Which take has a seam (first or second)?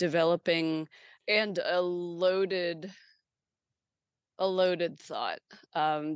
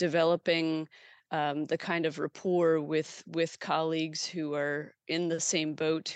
first